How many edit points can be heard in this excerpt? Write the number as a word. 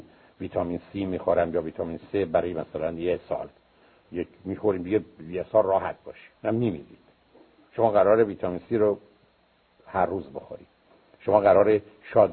one